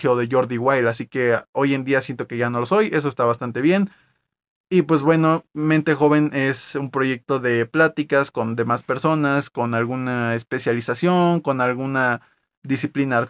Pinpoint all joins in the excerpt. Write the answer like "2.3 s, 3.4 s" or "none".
none